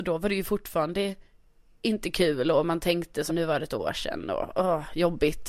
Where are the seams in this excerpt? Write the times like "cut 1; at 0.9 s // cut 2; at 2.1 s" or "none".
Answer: cut 1; at 3.3 s